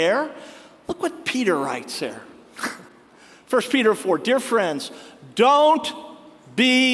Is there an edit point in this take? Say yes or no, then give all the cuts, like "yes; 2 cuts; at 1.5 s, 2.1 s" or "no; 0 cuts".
no; 0 cuts